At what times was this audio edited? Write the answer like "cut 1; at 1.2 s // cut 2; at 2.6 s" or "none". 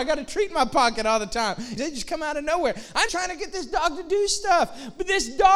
cut 1; at 1.8 s // cut 2; at 3.1 s